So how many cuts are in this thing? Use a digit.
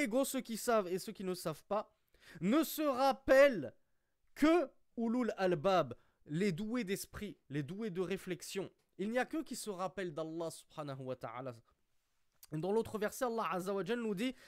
0